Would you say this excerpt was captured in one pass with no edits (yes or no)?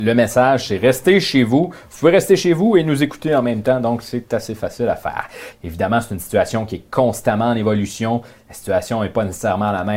no